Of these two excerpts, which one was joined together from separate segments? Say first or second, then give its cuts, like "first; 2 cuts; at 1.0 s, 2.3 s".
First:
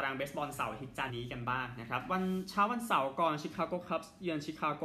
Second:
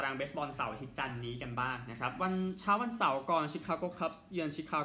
first; 1 cut; at 1.1 s